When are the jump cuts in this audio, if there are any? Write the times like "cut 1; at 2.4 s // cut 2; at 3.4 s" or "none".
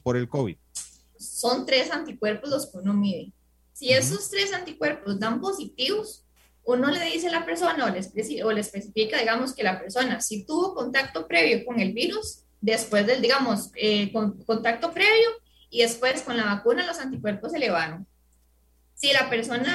cut 1; at 1.1 s